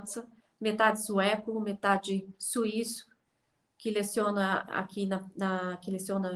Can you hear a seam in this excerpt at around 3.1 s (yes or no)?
no